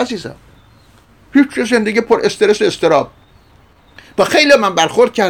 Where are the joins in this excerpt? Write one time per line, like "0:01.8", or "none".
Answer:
none

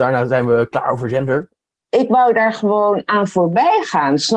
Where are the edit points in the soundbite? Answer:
0:01.8

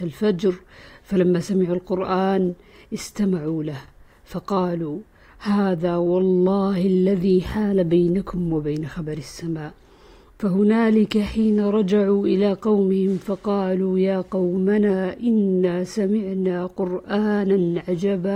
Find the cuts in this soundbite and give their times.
none

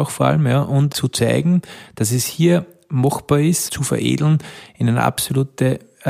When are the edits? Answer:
0:00.9
0:03.7

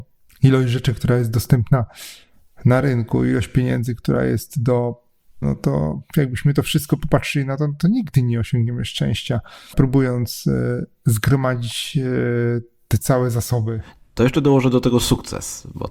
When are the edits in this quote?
0:05.4

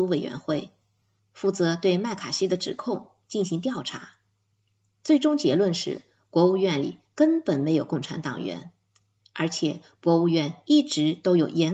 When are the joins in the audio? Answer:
none

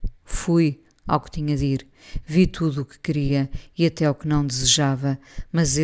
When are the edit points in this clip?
none

